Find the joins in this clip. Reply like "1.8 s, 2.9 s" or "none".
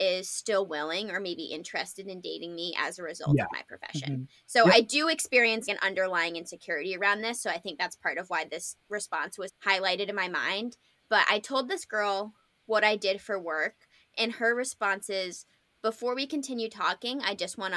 5.7 s, 9.5 s